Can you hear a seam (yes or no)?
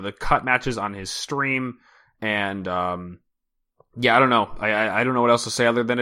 no